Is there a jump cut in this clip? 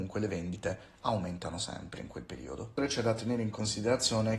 no; 0 cuts

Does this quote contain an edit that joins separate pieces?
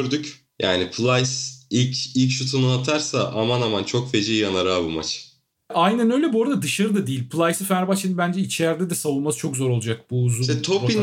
no; 0 cuts

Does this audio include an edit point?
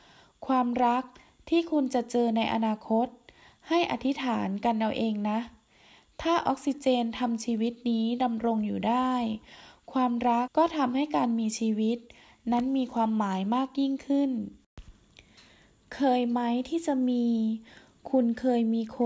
yes; 1 cut; at 10.5 s

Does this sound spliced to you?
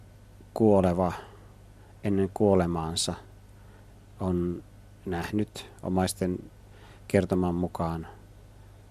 no; 0 cuts

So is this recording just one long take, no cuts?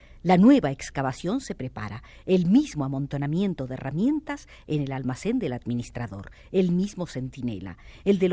yes; 0 cuts

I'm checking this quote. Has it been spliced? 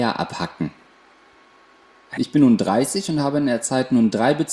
yes; 1 cut; at 2.2 s

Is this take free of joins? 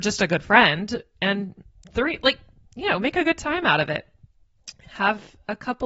yes; 0 cuts

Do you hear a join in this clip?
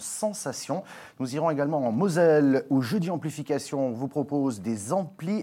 no; 0 cuts

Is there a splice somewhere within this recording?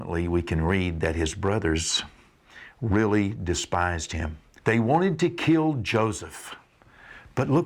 yes; 1 cut; at 4.6 s

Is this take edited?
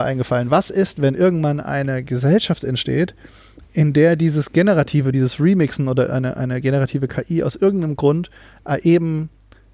no; 0 cuts

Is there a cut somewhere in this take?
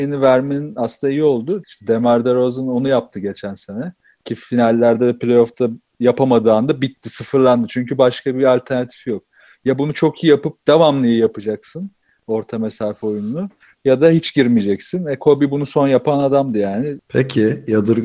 yes; 2 cuts; at 1.6 s, 17.0 s

